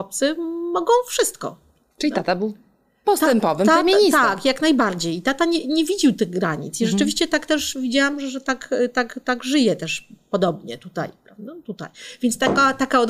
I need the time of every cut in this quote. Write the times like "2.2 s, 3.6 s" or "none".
none